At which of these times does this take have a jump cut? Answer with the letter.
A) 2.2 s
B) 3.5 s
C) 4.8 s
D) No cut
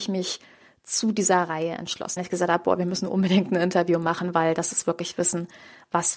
A